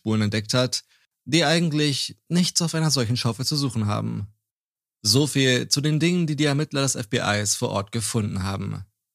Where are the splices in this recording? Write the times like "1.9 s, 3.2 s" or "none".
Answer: none

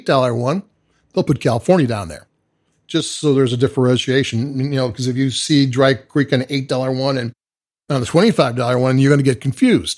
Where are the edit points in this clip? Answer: none

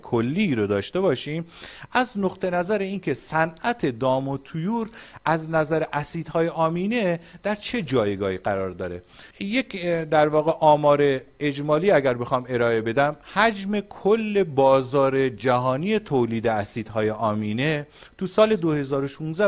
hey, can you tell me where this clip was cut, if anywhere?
9.3 s

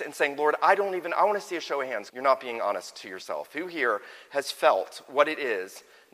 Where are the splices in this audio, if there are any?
2.1 s

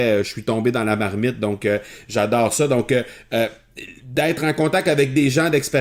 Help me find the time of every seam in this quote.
none

